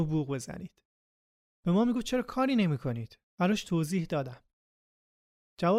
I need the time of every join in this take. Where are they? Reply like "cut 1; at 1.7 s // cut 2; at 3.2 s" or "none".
cut 1; at 3.3 s

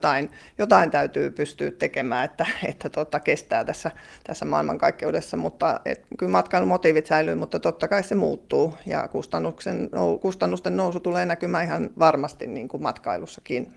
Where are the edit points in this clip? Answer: none

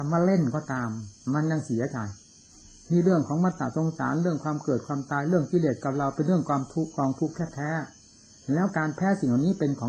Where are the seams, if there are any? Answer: none

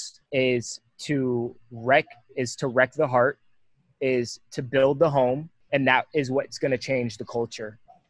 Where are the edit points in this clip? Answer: none

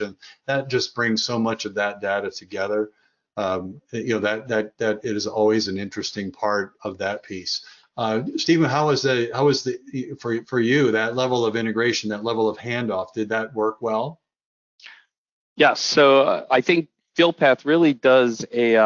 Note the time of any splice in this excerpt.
cut 1; at 6.8 s

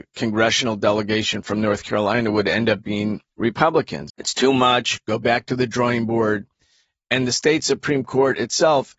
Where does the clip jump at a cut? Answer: cut 1; at 4.1 s

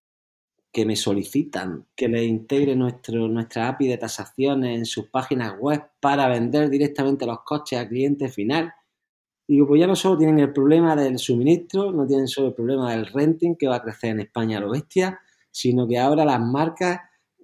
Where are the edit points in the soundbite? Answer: cut 1; at 1.9 s

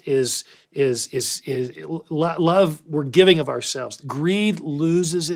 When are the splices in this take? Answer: cut 1; at 1.7 s // cut 2; at 4.0 s

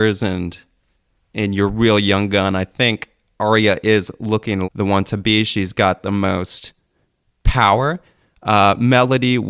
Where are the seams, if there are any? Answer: cut 1; at 4.6 s

